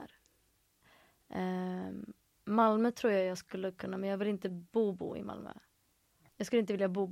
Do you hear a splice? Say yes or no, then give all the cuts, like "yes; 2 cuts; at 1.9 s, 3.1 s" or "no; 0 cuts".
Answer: yes; 1 cut; at 2.2 s